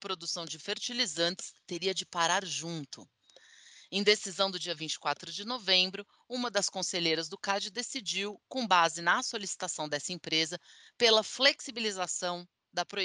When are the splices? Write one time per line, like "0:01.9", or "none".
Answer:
none